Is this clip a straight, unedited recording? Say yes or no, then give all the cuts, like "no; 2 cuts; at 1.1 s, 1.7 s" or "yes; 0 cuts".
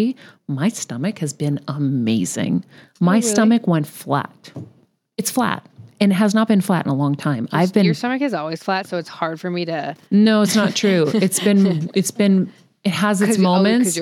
yes; 0 cuts